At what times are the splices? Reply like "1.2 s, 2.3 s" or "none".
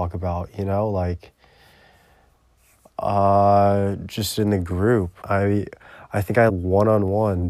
5.2 s, 6.5 s

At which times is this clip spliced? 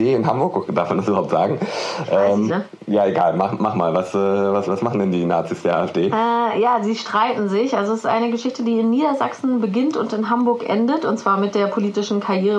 2.5 s, 4.7 s

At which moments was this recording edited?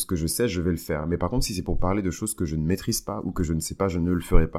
none

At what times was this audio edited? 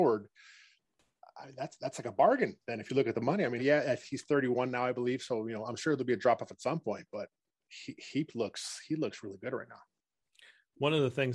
3.6 s

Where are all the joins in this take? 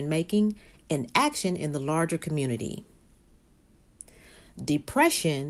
none

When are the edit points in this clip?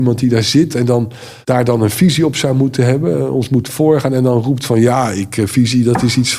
1.4 s

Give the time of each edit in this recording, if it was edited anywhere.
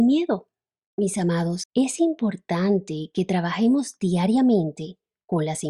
1.7 s

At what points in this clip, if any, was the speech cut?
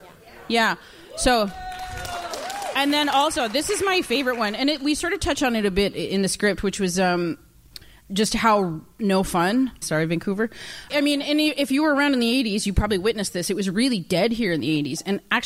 9.8 s, 10.9 s

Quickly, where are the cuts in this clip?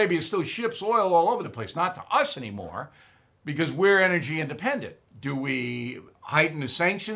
5.1 s

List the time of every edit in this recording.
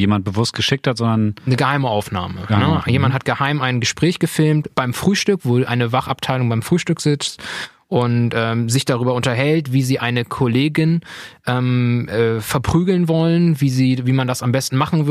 none

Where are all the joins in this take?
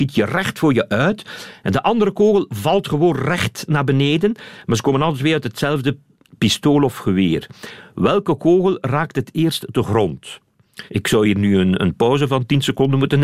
10.9 s

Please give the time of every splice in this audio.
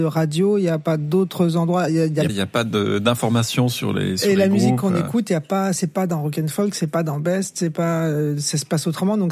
2.3 s

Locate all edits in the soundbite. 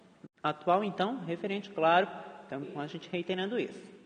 2.6 s

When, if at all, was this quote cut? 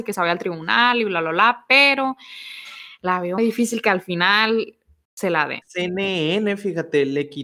3.4 s, 5.6 s

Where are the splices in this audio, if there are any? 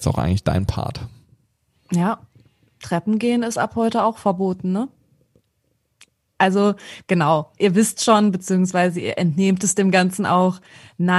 none

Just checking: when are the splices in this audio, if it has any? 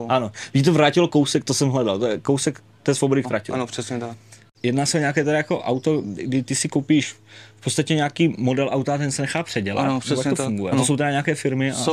3.2 s, 10.7 s

